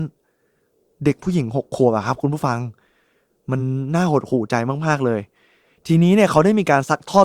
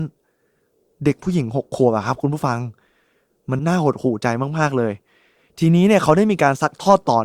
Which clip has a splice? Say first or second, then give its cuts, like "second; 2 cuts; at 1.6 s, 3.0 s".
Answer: second; 1 cut; at 3.6 s